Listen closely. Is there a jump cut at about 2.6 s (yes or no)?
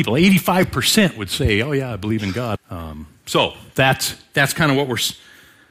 yes